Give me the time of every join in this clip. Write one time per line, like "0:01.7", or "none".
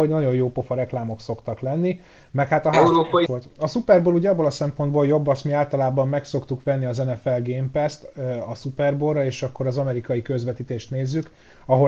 0:03.3